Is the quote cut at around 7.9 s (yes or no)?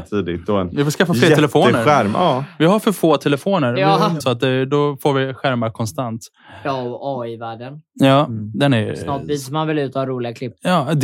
no